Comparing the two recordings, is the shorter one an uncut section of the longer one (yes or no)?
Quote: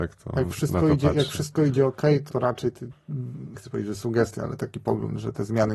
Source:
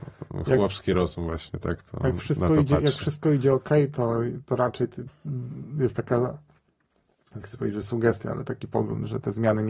no